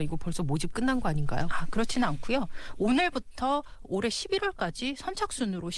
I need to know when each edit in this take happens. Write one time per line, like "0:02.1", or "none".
none